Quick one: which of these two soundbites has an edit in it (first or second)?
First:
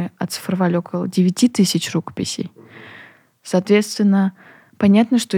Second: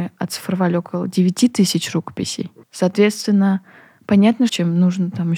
second